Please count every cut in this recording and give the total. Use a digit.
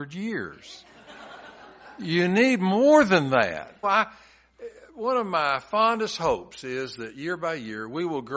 1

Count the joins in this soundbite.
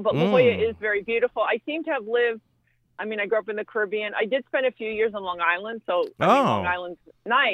0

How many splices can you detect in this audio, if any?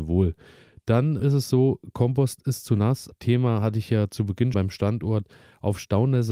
3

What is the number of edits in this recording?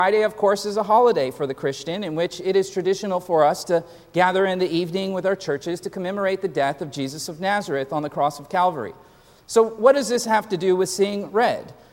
0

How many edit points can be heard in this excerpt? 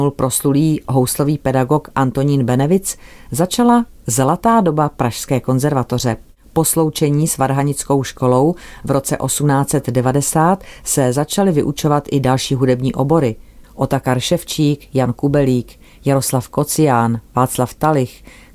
1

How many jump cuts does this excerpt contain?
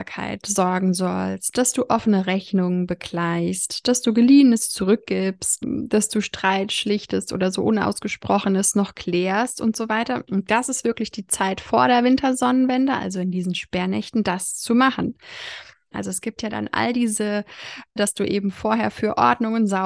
3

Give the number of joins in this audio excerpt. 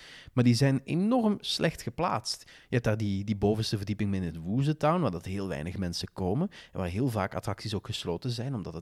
0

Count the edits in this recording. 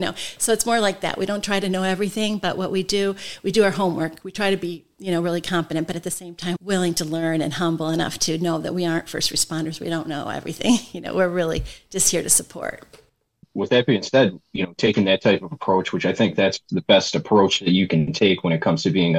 1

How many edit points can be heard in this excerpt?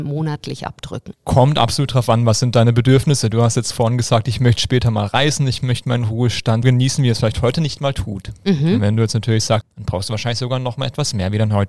2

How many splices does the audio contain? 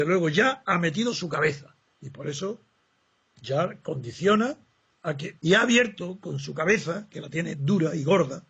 2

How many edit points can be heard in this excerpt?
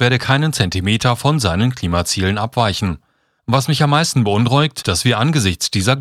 2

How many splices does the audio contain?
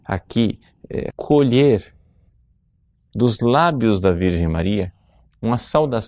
1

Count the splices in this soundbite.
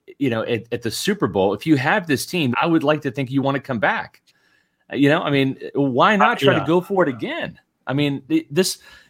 1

